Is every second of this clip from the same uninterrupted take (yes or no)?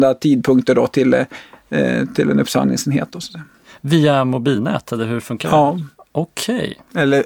yes